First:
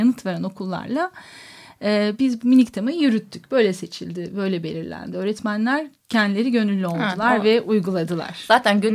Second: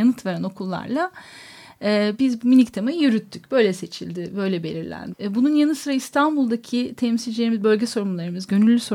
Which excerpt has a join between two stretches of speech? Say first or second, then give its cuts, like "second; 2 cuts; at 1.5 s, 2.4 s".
second; 1 cut; at 5.1 s